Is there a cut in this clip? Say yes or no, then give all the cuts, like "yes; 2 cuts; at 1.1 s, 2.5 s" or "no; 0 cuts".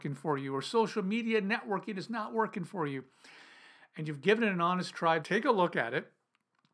yes; 1 cut; at 5.2 s